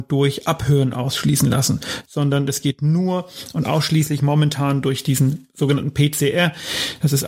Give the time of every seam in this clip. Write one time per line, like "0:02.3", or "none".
none